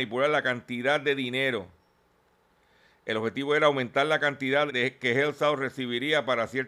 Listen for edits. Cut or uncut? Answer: cut